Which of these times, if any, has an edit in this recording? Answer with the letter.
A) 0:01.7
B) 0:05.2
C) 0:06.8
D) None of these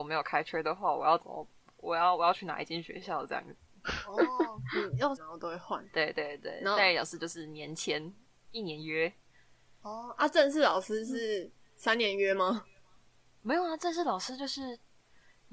B